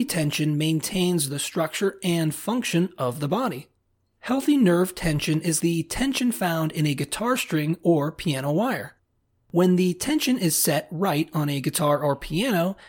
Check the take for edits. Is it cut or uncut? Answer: cut